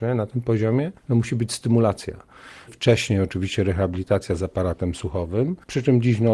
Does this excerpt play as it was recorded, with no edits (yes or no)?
no